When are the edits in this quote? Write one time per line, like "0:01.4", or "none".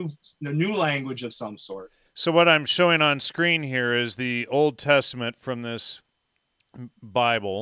0:02.0